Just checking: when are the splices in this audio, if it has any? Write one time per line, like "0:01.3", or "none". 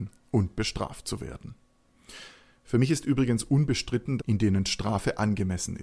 0:04.2

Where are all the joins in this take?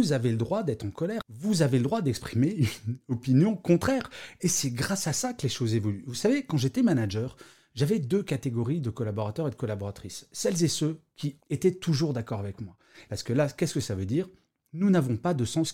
0:11.4
0:13.1

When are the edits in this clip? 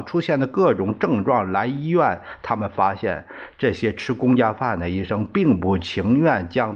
none

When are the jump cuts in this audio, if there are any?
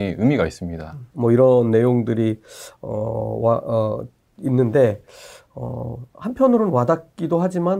0:01.1

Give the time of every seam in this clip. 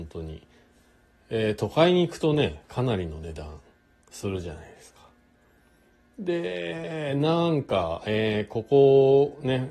none

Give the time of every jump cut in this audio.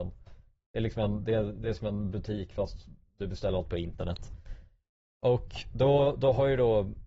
none

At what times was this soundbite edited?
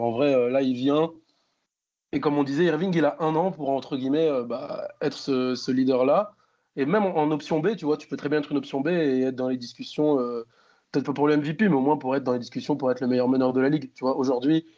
none

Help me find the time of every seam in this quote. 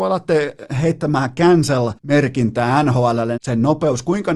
0:02.0
0:03.4

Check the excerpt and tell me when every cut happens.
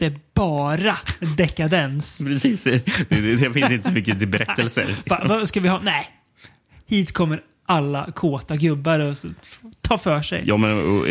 none

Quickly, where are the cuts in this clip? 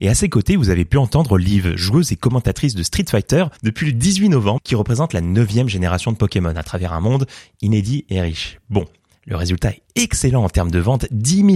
0:03.6
0:04.6

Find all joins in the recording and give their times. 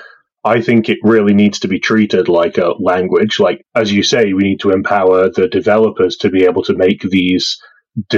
none

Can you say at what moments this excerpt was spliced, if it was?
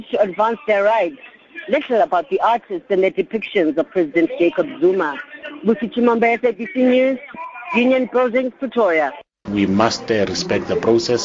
0:09.5

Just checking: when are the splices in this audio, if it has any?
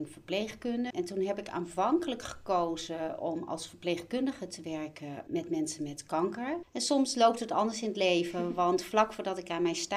0:00.9
0:05.3
0:06.6

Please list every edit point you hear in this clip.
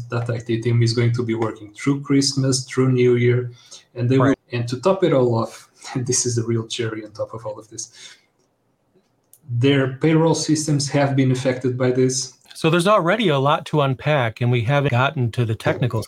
0:04.3
0:12.4
0:14.9

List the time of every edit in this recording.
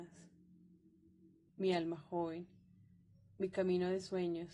0:01.5

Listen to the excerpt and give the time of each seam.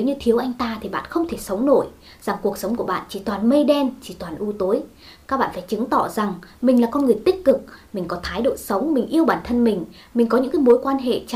none

